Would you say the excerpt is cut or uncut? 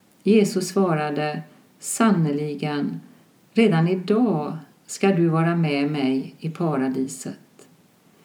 uncut